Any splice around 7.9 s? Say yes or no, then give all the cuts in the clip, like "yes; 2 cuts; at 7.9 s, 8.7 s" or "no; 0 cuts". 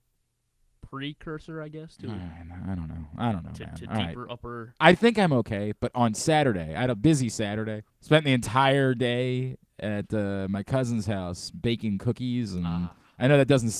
yes; 1 cut; at 7.9 s